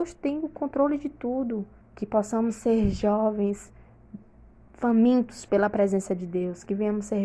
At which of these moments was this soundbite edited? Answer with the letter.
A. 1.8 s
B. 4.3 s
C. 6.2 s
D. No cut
A